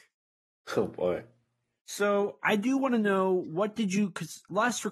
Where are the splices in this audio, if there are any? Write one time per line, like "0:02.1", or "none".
0:02.4